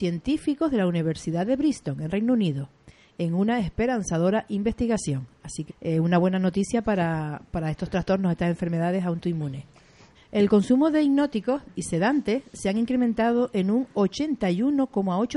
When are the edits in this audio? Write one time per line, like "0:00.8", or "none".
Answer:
0:05.7
0:10.1